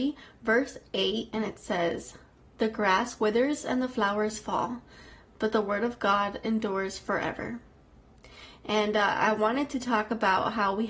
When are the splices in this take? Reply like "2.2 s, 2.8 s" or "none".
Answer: none